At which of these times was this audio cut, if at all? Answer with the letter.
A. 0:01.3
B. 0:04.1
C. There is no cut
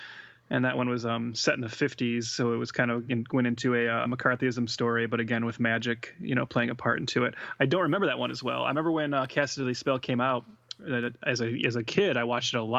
B